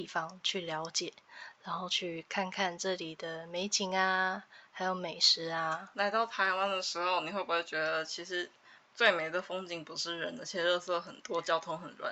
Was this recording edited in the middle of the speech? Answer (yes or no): no